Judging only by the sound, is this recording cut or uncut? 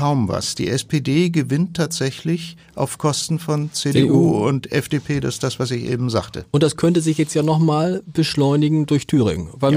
uncut